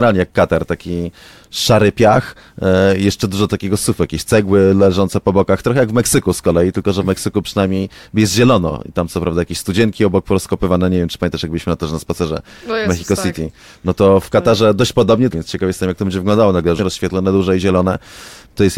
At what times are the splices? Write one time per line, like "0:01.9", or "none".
0:15.3
0:16.8